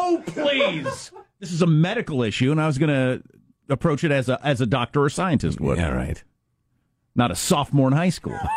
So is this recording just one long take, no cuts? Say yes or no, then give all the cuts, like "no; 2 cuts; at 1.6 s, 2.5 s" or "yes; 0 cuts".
yes; 0 cuts